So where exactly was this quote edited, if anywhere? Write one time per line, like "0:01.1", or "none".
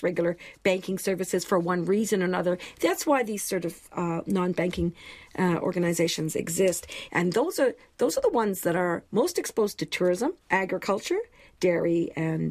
0:07.1
0:10.4